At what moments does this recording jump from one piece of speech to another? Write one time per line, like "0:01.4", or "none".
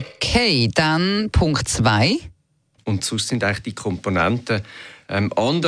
0:02.8